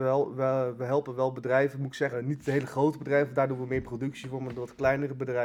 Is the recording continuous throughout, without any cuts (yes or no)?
no